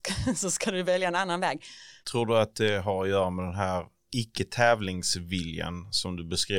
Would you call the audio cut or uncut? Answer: cut